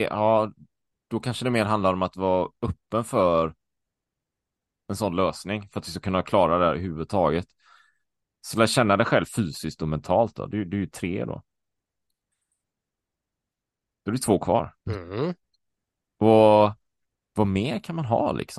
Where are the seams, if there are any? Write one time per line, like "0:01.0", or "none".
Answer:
0:08.4
0:14.8